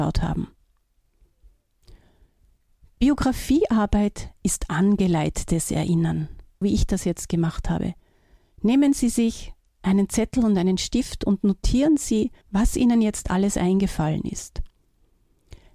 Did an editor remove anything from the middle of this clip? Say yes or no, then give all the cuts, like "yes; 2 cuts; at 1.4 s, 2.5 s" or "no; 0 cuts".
yes; 2 cuts; at 6.6 s, 12.4 s